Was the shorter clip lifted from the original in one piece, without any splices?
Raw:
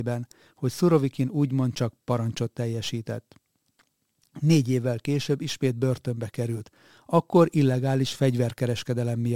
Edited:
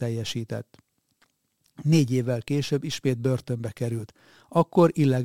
yes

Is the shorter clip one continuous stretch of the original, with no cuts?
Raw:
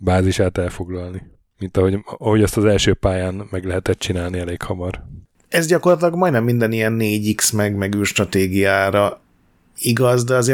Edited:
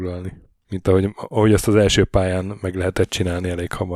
yes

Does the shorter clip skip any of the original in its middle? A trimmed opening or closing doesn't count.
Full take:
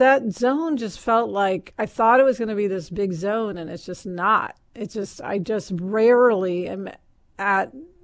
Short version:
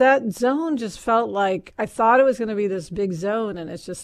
no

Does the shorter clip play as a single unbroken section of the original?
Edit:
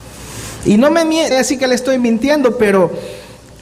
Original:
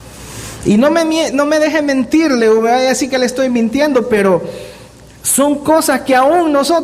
no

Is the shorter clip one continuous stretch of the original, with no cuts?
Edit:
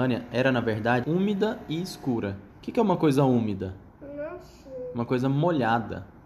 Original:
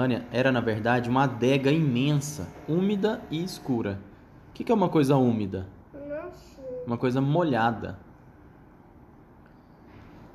no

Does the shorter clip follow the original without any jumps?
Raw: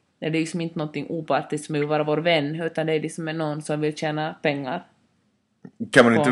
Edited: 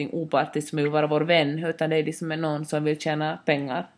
yes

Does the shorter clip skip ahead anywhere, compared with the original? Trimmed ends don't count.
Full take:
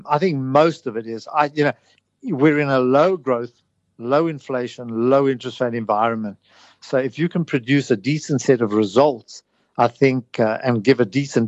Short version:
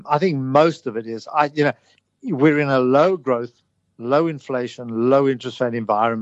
no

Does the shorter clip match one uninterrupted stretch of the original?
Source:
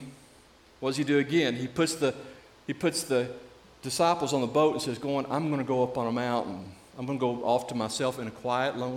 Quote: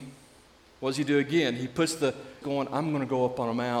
no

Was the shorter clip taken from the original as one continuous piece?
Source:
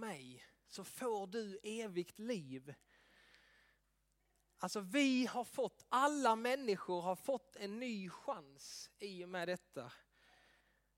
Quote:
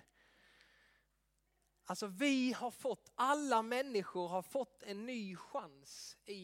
yes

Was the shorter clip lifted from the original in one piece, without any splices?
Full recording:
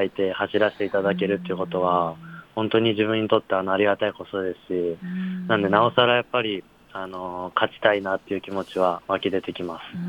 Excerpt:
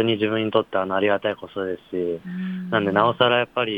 yes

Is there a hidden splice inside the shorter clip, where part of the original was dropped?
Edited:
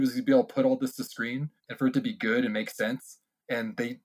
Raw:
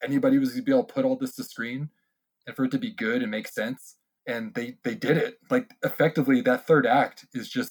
yes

